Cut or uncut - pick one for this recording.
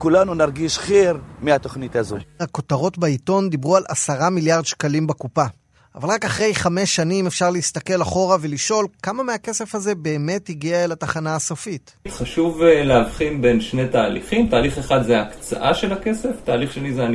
uncut